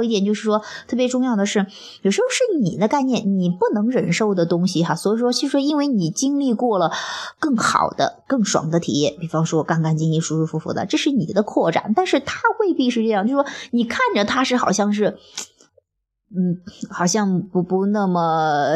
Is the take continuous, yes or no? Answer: yes